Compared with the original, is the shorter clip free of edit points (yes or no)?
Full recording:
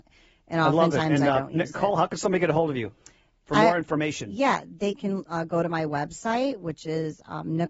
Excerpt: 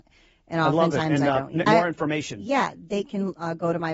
no